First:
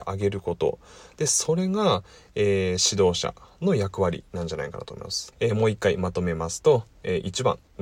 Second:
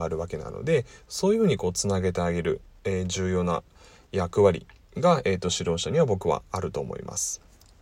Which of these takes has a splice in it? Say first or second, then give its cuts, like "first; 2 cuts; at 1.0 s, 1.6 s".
first; 1 cut; at 5.3 s